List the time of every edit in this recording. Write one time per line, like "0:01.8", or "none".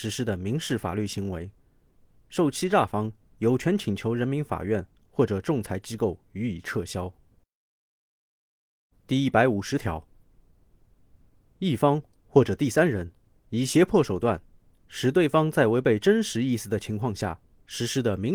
0:08.9